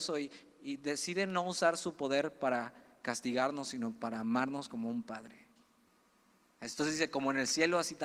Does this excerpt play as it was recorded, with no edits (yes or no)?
no